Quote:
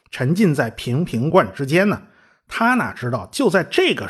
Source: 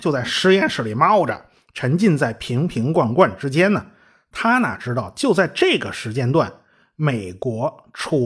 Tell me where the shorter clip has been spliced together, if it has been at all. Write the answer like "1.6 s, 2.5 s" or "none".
1.3 s